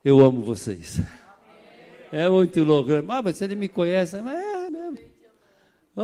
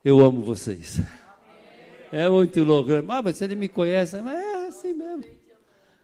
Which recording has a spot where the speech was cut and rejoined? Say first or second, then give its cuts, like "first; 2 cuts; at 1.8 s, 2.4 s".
first; 1 cut; at 4.7 s